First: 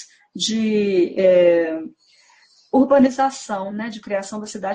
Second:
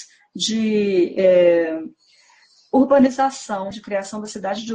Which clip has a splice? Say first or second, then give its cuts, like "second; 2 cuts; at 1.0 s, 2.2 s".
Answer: second; 1 cut; at 3.7 s